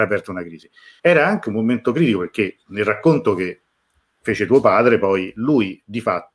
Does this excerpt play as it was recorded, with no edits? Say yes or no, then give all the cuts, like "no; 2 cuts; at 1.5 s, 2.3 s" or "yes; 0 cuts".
no; 1 cut; at 1.0 s